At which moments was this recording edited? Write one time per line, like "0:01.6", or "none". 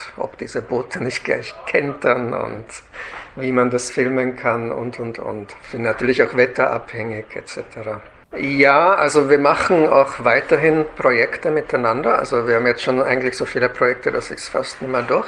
0:08.3